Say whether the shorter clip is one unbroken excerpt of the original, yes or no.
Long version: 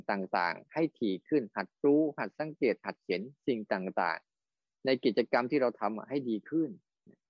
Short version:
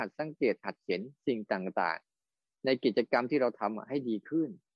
yes